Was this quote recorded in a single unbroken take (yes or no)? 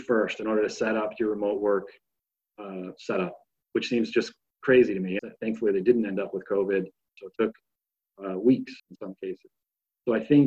no